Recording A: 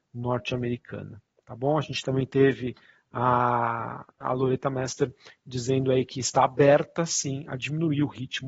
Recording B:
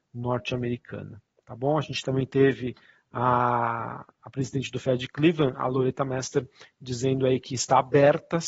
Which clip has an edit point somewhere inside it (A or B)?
A